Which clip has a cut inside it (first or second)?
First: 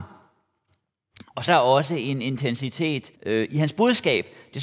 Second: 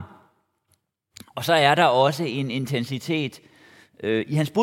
first